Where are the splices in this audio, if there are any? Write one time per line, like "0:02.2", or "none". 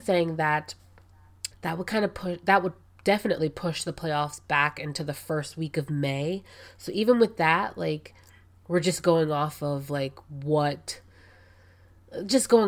0:01.5